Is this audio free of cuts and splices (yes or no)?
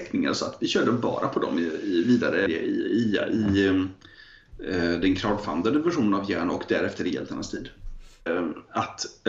no